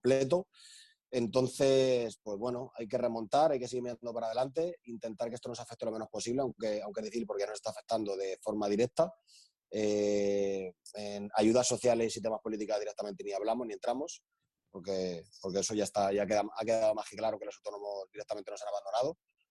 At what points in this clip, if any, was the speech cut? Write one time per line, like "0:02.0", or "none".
none